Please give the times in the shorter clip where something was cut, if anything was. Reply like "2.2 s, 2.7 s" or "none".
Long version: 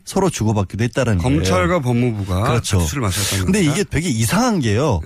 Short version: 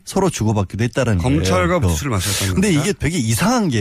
1.8 s